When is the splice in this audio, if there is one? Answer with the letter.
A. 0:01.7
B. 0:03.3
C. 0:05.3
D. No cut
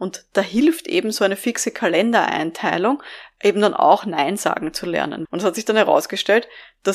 C